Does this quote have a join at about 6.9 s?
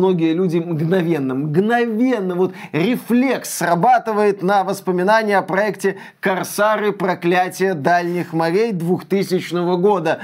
no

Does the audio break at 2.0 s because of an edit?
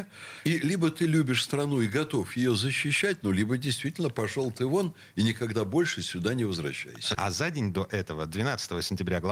no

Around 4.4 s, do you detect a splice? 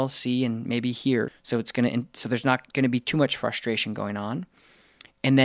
no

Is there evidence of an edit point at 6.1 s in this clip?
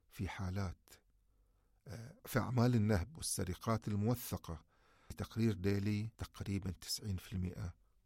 yes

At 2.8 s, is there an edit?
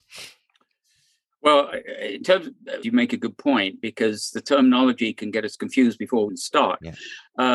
yes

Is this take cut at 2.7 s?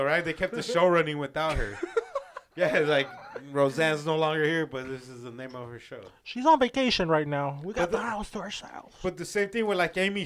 no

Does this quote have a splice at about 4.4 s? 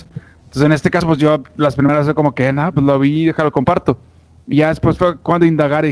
no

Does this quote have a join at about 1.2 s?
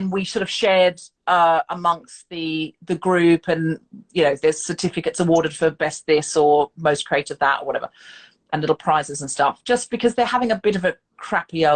yes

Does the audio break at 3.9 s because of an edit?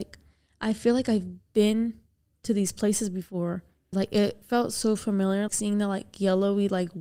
yes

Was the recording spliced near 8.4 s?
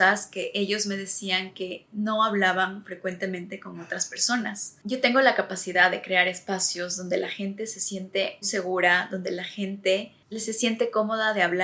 yes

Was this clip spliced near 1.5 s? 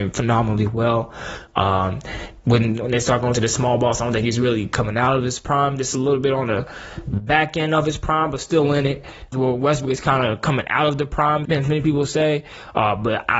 no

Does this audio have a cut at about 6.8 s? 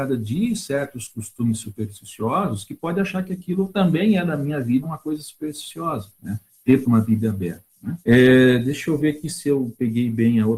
yes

